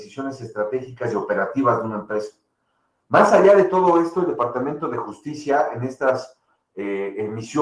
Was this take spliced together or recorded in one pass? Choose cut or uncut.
uncut